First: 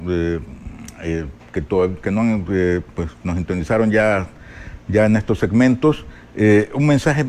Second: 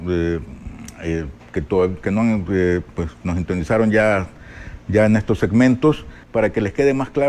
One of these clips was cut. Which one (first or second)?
second